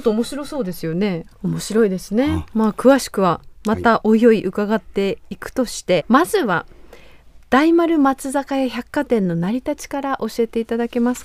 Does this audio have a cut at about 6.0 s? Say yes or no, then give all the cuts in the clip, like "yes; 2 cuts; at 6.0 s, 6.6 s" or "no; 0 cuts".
yes; 2 cuts; at 1.3 s, 6.0 s